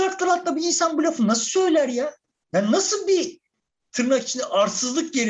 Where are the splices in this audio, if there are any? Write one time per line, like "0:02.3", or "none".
none